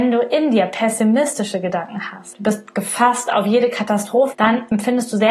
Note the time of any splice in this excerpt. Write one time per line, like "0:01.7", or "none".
0:02.3
0:04.3